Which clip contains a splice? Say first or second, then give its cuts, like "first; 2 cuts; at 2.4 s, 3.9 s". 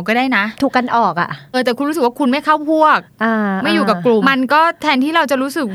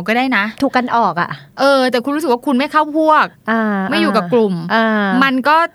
first; 2 cuts; at 1.5 s, 4.2 s